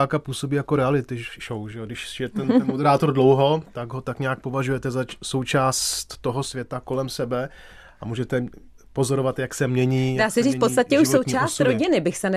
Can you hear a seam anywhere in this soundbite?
no; 0 cuts

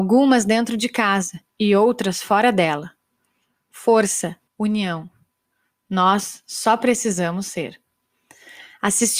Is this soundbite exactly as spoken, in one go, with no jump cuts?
no; 2 cuts; at 1.5 s, 4.5 s

